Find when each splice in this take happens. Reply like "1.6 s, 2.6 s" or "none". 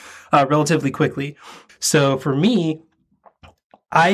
1.7 s